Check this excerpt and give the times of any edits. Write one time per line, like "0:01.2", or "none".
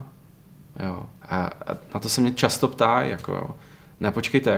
0:01.2